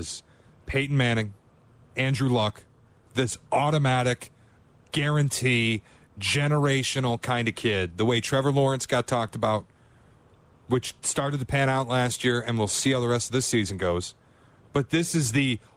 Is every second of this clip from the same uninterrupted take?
yes; 0 cuts

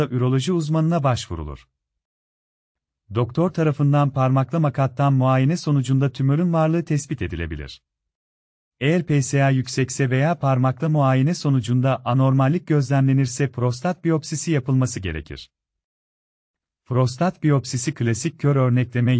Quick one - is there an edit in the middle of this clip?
yes; 1 cut; at 8.7 s

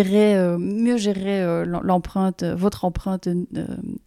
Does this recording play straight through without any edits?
yes; 0 cuts

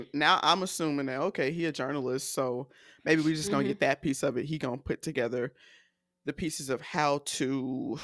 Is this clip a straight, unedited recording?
yes; 0 cuts

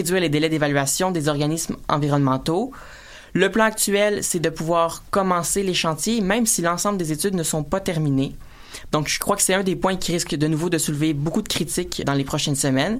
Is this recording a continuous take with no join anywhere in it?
no; 2 cuts; at 8.9 s, 12.0 s

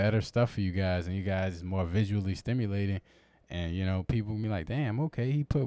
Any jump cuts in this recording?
no; 0 cuts

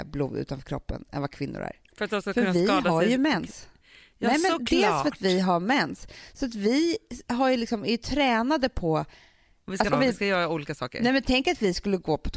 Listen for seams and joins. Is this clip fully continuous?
no; 1 cut; at 9.9 s

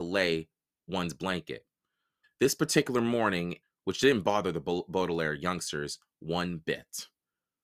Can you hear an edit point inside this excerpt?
yes; 2 cuts; at 2.2 s, 3.6 s

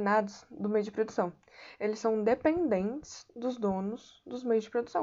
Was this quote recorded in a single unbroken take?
yes; 0 cuts

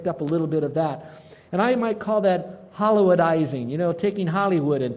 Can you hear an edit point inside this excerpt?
no; 0 cuts

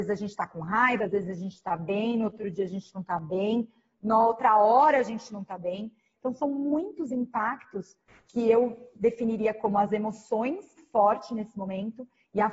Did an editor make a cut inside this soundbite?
yes; 3 cuts; at 1.0 s, 6.1 s, 10.8 s

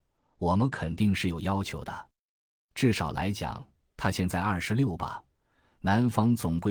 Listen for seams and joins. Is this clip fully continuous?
yes; 0 cuts

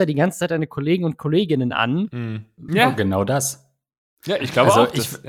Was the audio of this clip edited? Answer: yes; 1 cut; at 2.7 s

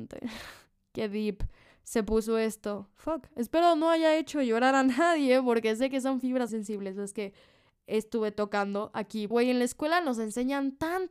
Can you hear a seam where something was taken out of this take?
yes; 2 cuts; at 6.5 s, 9.3 s

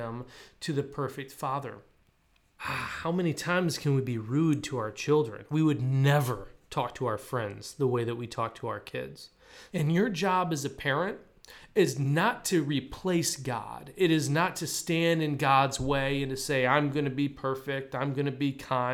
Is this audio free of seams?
no; 2 cuts; at 2.6 s, 9.7 s

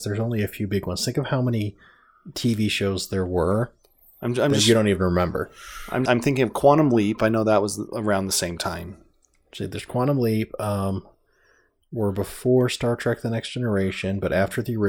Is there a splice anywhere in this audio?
yes; 1 cut; at 6.1 s

